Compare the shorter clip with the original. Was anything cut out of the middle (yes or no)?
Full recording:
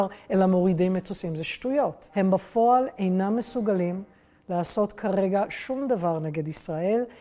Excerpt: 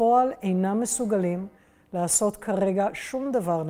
no